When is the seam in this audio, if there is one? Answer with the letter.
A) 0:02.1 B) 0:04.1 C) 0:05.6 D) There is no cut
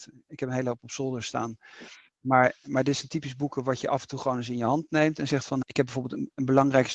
C